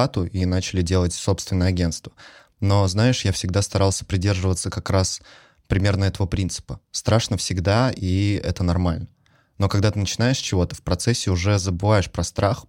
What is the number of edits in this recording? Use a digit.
0